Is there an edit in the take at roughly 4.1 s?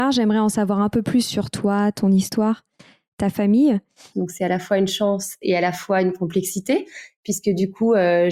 yes; 1 cut; at 4.1 s

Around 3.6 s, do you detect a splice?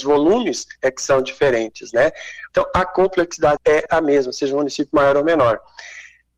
yes; 2 cuts; at 2.5 s, 3.6 s

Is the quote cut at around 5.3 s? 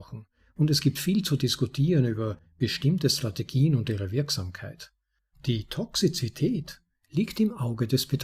yes; 1 cut; at 5.3 s

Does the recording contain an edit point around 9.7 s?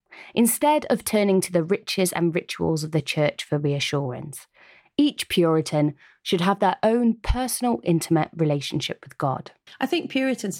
yes; 1 cut; at 9.7 s

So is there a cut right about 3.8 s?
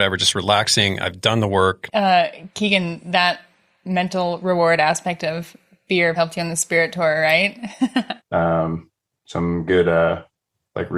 no; 3 cuts; at 1.9 s, 6.2 s, 8.2 s

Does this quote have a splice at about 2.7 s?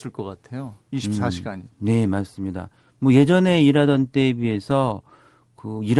no; 0 cuts

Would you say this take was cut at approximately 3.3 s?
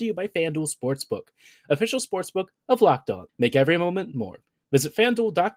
yes; 1 cut; at 3.3 s

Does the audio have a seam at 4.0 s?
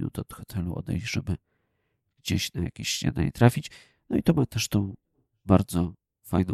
no; 0 cuts

